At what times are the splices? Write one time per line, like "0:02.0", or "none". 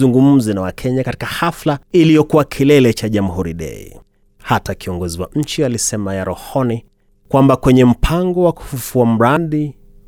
0:01.8